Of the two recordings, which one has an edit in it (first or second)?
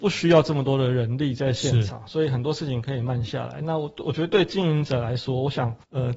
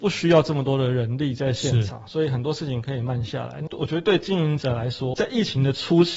second